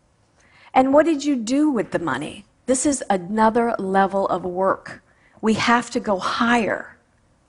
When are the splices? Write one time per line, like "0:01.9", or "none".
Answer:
0:02.6